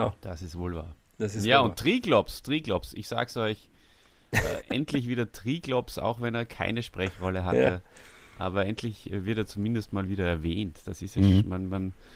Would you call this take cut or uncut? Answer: cut